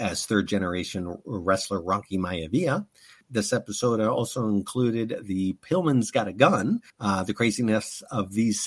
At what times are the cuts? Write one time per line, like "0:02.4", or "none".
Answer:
0:03.2
0:06.9